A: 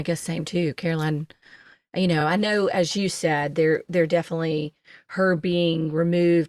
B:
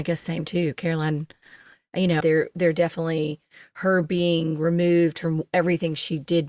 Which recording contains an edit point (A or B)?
B